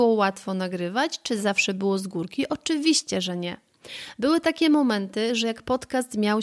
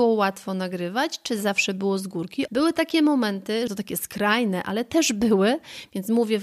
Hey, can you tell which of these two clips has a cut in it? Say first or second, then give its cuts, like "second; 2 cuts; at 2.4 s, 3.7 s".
second; 2 cuts; at 2.5 s, 3.7 s